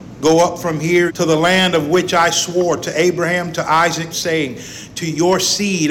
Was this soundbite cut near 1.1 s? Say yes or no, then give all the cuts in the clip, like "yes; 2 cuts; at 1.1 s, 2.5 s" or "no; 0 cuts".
yes; 2 cuts; at 1.1 s, 4.1 s